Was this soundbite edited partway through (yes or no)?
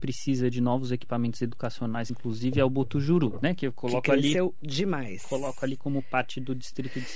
no